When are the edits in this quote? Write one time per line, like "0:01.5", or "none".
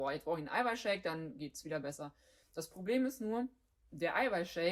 none

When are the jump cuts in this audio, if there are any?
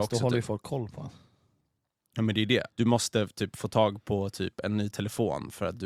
0:02.7

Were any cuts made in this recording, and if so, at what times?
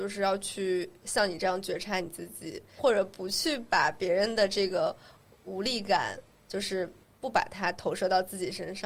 0:02.8

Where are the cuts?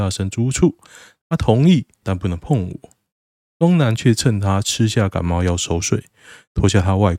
0:02.0

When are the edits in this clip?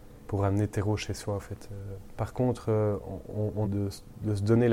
0:02.2
0:03.6

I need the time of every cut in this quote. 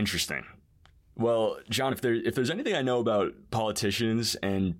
none

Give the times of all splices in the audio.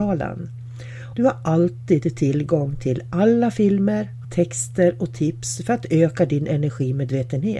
0:01.1
0:04.2

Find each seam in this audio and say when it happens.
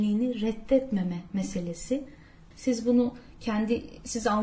0:02.5

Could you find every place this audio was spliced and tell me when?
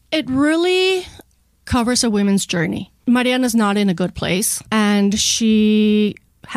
0:04.7

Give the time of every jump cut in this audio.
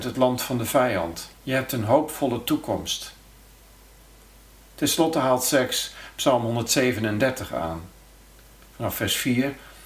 0:01.3

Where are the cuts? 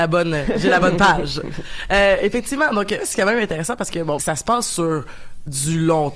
0:03.0
0:04.2

